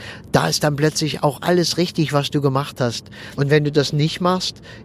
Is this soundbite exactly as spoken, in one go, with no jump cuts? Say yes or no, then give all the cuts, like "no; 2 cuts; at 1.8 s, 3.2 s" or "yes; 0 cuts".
no; 1 cut; at 3.4 s